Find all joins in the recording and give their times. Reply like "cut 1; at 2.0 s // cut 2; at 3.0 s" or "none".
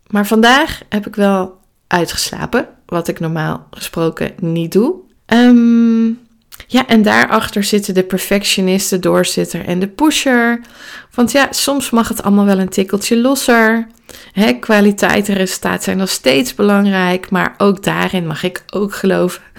cut 1; at 5.2 s